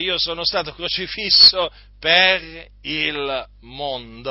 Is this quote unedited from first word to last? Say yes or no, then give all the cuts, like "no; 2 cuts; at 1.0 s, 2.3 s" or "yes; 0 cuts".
yes; 0 cuts